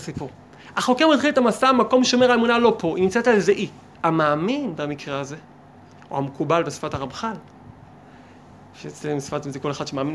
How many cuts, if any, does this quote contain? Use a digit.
1